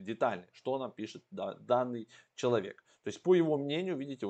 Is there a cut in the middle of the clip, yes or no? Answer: no